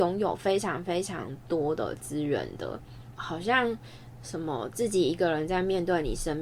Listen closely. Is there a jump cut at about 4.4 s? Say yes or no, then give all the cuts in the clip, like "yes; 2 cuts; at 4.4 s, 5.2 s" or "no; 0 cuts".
no; 1 cut; at 3.2 s